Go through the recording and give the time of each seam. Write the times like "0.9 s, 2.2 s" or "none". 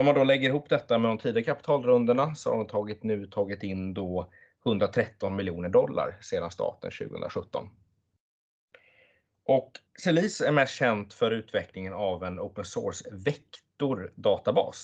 9.9 s